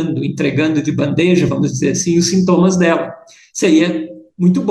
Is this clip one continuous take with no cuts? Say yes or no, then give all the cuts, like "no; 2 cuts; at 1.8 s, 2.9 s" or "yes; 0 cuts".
yes; 0 cuts